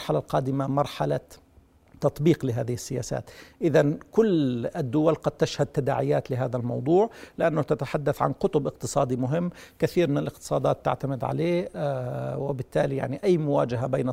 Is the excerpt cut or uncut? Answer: uncut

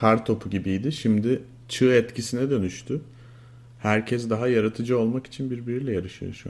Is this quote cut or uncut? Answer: uncut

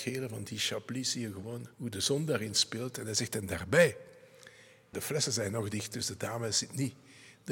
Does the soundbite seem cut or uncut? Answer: cut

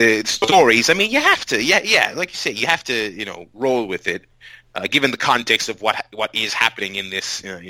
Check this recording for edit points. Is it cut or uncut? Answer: uncut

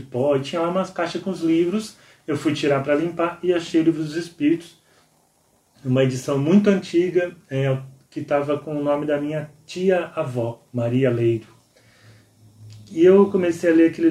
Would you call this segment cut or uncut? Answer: uncut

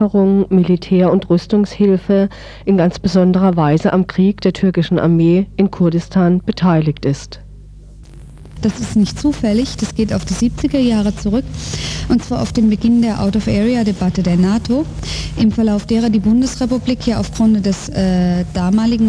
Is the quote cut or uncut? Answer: cut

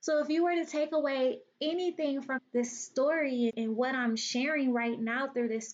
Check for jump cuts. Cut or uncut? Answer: cut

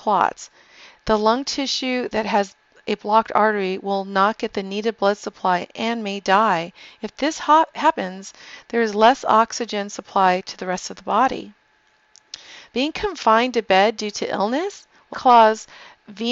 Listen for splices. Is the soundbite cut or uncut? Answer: cut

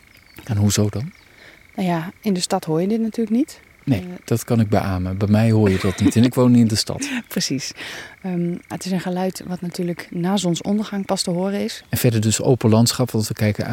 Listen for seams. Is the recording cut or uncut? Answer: cut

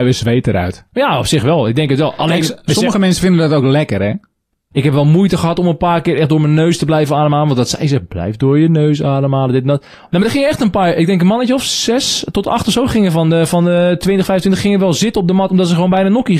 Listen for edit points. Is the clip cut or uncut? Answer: uncut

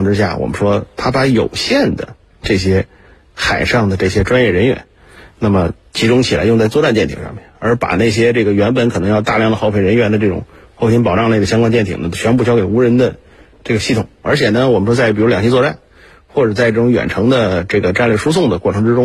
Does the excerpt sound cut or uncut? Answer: cut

